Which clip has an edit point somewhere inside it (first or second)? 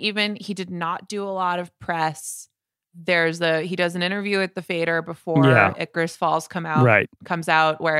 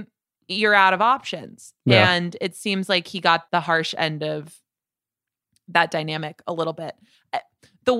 second